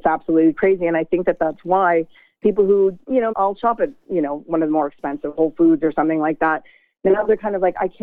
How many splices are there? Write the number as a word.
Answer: one